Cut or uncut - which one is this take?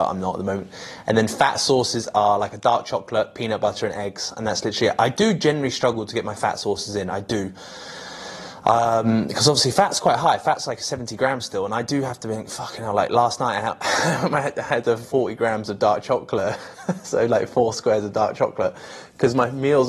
cut